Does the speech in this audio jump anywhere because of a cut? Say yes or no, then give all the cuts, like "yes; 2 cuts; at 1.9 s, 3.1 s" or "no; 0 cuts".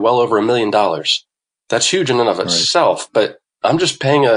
no; 0 cuts